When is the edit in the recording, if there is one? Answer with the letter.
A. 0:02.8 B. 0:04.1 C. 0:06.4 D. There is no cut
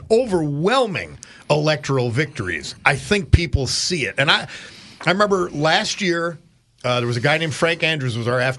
A